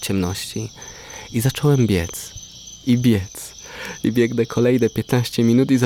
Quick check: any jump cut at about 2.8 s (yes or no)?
no